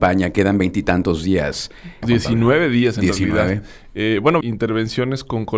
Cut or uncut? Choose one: cut